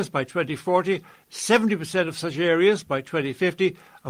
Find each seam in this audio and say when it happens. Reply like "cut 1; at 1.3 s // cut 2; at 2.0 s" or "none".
cut 1; at 1.1 s